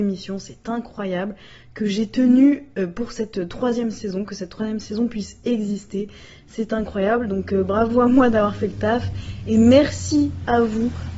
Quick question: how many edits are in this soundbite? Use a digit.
0